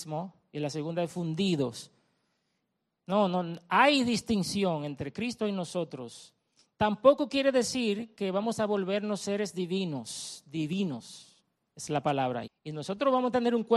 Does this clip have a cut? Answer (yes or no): yes